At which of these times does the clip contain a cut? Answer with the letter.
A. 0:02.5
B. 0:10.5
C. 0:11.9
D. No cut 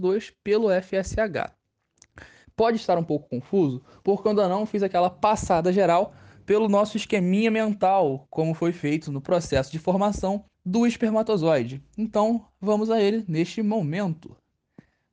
B